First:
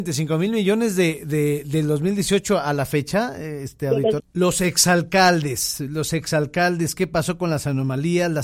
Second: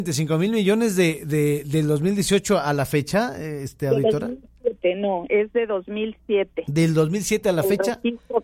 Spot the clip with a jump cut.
first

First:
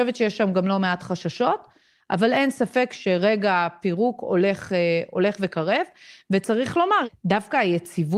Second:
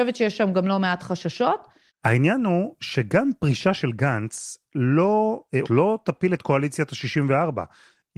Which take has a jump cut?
second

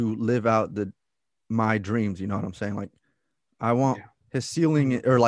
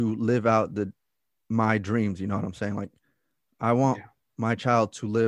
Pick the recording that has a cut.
first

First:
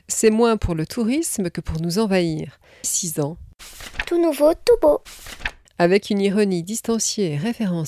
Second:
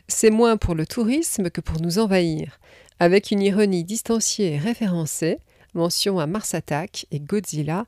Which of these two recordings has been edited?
first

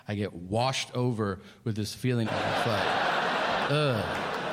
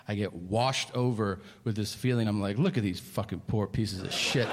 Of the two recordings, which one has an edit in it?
first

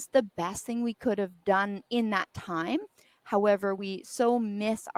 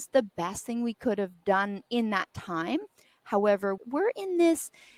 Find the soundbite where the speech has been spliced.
second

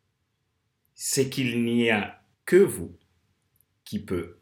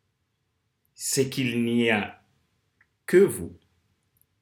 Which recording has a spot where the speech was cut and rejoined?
first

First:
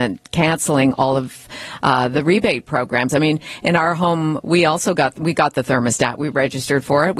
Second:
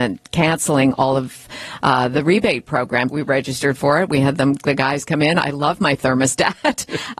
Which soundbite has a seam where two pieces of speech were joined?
second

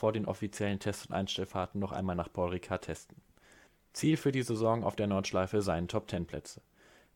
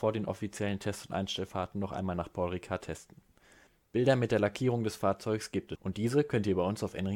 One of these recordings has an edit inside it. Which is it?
second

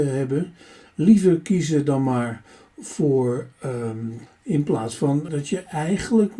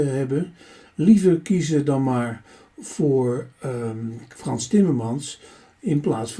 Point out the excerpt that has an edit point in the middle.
first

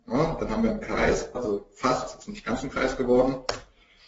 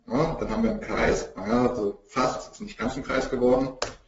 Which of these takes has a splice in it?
first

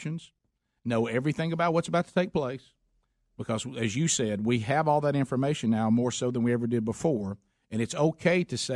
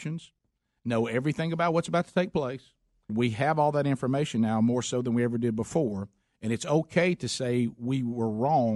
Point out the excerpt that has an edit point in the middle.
second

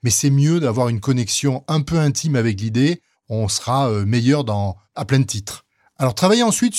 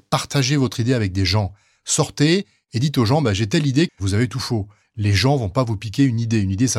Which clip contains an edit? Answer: second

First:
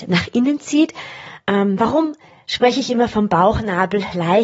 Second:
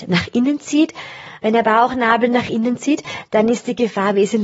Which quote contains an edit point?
second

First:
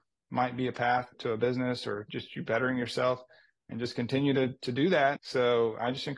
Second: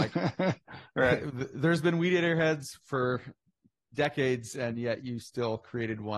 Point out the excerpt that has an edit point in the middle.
first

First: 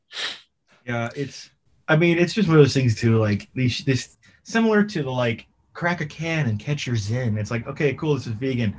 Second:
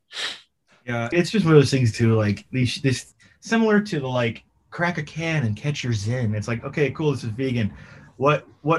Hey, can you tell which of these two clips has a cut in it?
second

